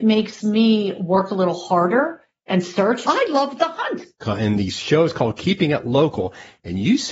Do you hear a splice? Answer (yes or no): yes